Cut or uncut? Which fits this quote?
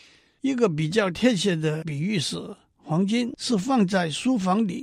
uncut